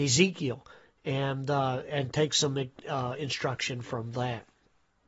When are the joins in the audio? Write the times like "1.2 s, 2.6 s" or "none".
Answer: none